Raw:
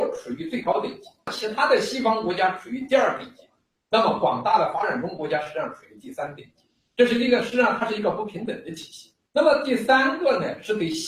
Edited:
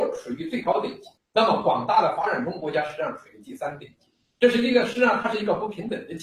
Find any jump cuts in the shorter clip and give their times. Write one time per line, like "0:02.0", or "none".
0:01.2